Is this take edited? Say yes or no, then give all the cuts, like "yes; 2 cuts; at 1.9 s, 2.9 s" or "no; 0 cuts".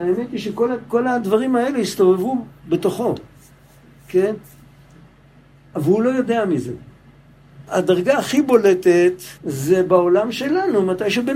yes; 2 cuts; at 7.7 s, 9.4 s